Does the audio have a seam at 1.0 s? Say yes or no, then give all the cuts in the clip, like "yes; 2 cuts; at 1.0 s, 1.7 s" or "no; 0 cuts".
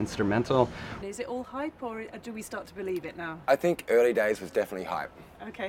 yes; 1 cut; at 1.0 s